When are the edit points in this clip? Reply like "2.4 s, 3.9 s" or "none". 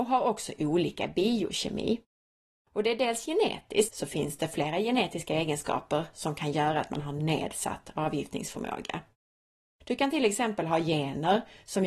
3.9 s